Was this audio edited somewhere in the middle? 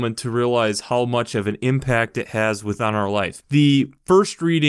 yes; 1 cut; at 3.4 s

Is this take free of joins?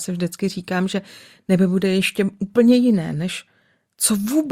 yes; 0 cuts

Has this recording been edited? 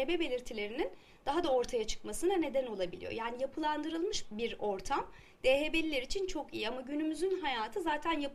yes; 1 cut; at 4.2 s

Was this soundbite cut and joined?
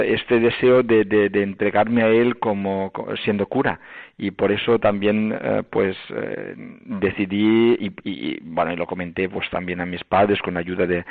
no; 0 cuts

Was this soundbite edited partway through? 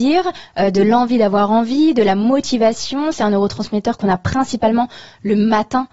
no; 0 cuts

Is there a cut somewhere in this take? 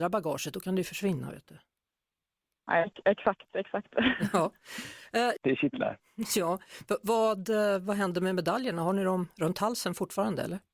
yes; 1 cut; at 5.4 s

